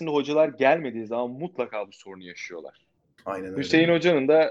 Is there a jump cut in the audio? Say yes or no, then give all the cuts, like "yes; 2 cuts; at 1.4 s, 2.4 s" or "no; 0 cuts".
yes; 1 cut; at 3.2 s